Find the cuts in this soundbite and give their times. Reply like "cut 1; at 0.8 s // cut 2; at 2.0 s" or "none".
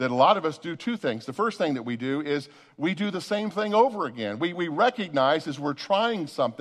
none